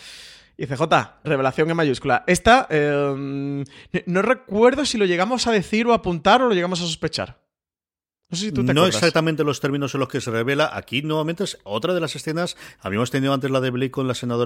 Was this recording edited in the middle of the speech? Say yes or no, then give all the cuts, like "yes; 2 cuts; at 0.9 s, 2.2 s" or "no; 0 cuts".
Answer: yes; 1 cut; at 1.2 s